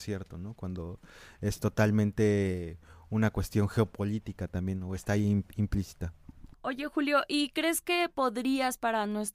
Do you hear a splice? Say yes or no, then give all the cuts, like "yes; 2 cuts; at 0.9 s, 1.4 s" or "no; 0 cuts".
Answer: yes; 1 cut; at 6.5 s